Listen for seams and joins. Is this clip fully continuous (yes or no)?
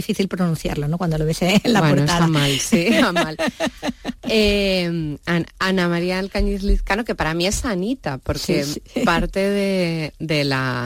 yes